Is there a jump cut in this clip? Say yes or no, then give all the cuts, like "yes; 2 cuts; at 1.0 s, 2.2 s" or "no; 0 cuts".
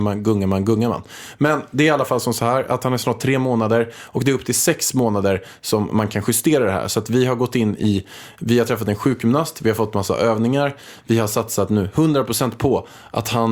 no; 0 cuts